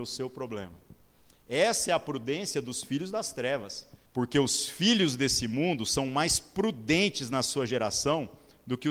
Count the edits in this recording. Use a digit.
1